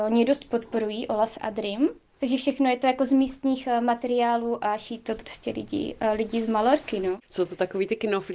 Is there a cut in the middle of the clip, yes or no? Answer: no